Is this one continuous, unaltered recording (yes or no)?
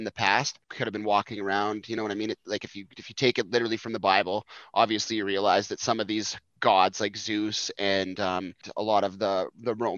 yes